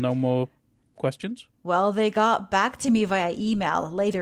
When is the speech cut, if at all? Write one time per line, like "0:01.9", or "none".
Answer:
none